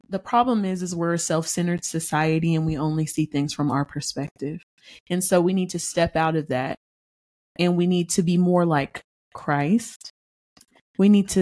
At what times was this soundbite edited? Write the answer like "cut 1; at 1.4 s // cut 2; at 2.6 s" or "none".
none